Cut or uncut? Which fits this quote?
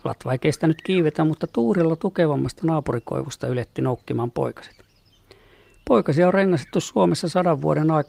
uncut